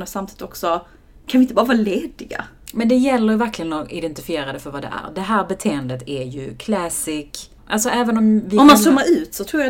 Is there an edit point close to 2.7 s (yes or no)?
no